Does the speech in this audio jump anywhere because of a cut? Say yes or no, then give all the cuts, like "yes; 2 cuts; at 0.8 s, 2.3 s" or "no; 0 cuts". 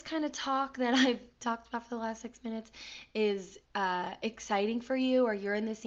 yes; 1 cut; at 3.6 s